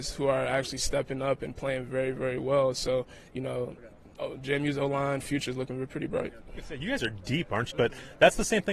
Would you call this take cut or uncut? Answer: cut